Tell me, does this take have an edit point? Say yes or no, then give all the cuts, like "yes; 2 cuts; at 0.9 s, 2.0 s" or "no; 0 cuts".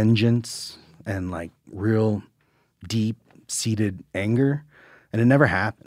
no; 0 cuts